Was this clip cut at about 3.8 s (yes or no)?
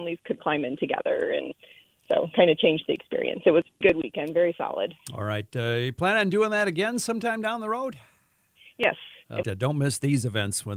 yes